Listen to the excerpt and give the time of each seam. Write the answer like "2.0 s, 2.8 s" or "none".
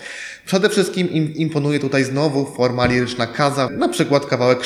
3.7 s